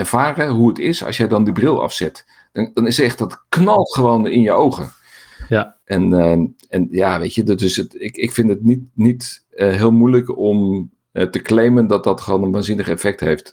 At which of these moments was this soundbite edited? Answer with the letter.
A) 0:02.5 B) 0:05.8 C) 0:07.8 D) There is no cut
B